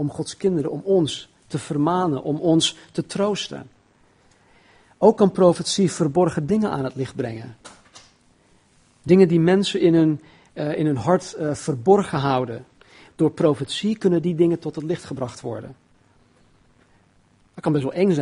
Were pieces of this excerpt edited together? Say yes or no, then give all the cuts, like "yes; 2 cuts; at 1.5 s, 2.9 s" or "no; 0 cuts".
yes; 1 cut; at 13.1 s